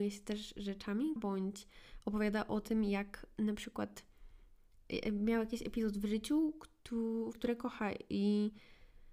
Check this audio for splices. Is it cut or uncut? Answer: cut